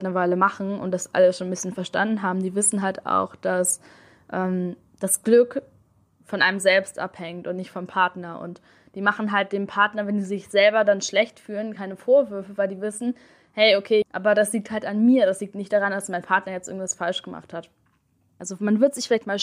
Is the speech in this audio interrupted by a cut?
yes; 2 cuts; at 14.0 s, 18.4 s

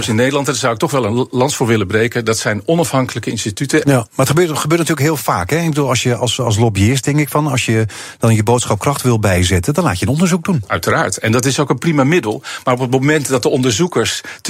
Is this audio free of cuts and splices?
no; 1 cut; at 3.8 s

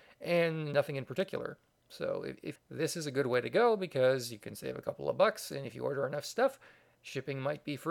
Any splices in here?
yes; 1 cut; at 2.6 s

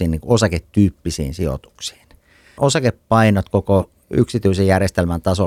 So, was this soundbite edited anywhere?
yes; 1 cut; at 2.6 s

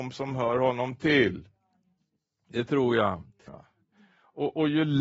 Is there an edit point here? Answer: yes; 1 cut; at 3.5 s

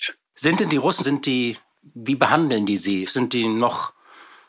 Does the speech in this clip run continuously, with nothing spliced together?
no; 2 cuts; at 1.0 s, 3.1 s

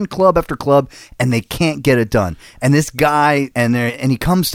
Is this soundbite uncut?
no; 1 cut; at 3.5 s

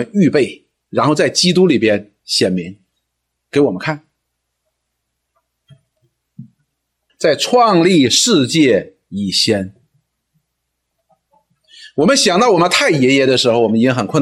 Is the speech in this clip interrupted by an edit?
yes; 1 cut; at 7.1 s

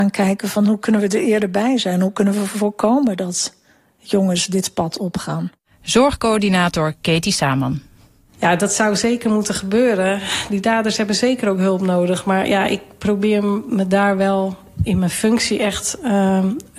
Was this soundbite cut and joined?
no; 0 cuts

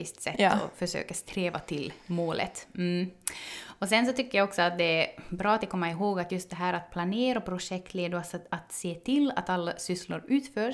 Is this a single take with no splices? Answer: yes; 0 cuts

